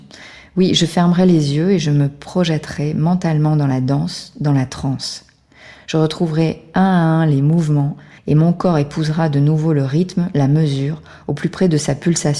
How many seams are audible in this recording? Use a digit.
1